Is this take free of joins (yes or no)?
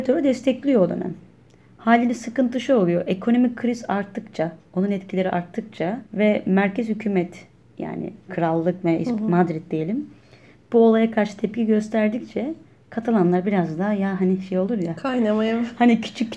no